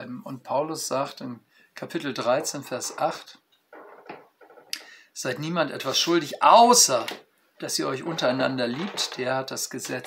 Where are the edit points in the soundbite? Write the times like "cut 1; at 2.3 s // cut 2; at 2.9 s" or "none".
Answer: cut 1; at 9.1 s